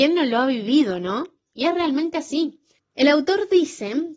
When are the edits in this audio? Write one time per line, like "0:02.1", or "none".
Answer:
0:01.5
0:02.8